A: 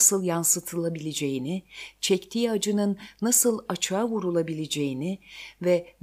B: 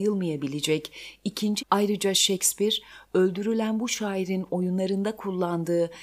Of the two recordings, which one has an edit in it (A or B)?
B